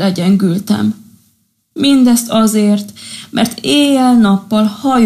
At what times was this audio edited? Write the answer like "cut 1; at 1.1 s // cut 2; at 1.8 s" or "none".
none